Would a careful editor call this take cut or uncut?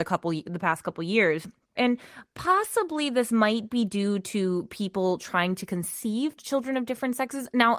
cut